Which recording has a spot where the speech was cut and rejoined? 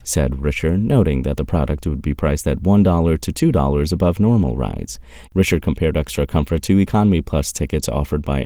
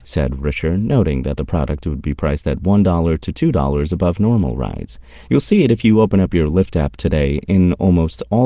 first; 1 cut; at 5.3 s

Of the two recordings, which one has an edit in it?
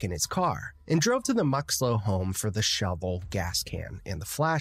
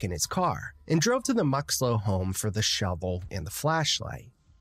second; 1 cut; at 3.3 s

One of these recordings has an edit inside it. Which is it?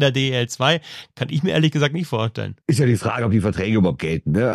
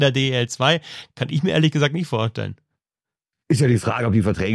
first; 1 cut; at 2.6 s

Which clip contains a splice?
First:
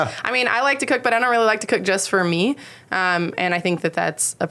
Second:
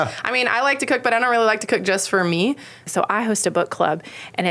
second; 1 cut; at 2.9 s

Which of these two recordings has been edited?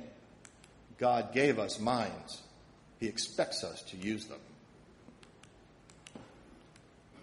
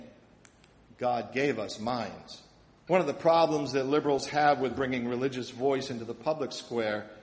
second; 1 cut; at 2.9 s

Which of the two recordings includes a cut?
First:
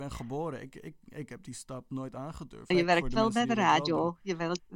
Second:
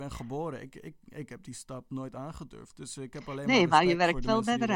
first; 1 cut; at 2.7 s

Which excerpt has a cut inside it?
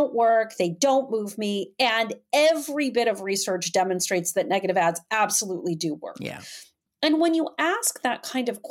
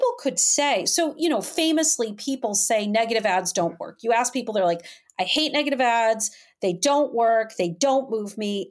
first; 1 cut; at 6.9 s

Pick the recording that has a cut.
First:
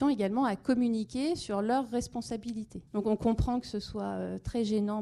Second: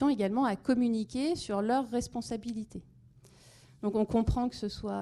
first; 1 cut; at 2.9 s

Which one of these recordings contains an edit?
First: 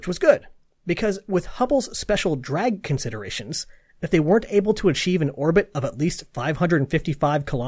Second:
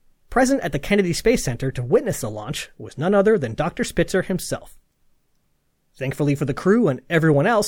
second; 1 cut; at 5.8 s

